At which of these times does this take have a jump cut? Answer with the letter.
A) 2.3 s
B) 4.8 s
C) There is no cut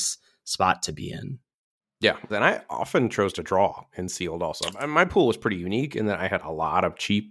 A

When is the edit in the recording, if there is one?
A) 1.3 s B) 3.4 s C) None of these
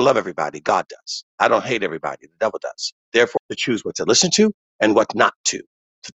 B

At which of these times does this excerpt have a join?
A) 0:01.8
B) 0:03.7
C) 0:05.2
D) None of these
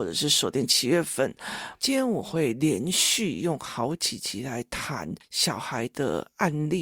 A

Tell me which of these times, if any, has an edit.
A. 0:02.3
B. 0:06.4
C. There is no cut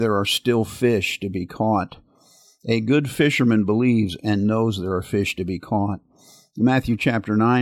C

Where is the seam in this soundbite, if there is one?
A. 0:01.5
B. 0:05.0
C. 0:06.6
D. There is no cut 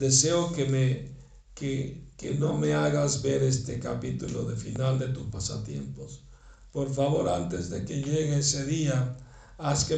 D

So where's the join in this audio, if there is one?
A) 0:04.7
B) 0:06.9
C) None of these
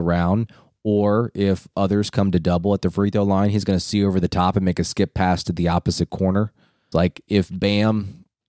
B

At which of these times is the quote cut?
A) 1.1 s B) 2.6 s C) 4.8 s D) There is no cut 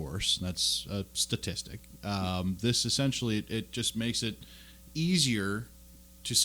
D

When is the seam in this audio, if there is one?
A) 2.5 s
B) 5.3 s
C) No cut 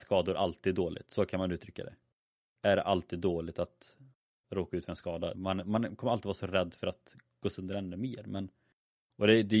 B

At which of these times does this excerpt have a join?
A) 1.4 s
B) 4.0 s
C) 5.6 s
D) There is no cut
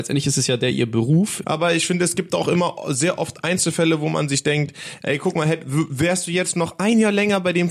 A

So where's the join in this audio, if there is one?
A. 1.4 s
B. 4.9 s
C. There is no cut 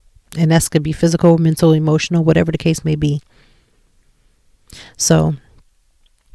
C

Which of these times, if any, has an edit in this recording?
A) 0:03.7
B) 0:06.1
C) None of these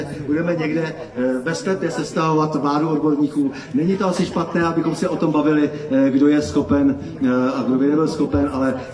C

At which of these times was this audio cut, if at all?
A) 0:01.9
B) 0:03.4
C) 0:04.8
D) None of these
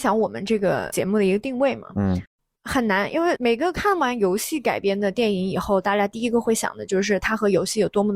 D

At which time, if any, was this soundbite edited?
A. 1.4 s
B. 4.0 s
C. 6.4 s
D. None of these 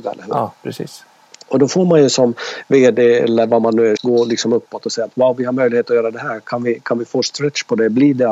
B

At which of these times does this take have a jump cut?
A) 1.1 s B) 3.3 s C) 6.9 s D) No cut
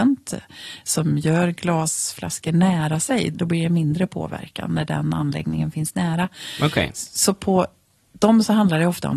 B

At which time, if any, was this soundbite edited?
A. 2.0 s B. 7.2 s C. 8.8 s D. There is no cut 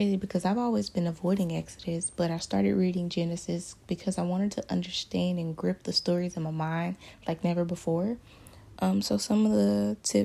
C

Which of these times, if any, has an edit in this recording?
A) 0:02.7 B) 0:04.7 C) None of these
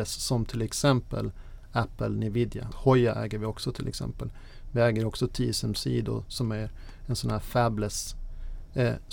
A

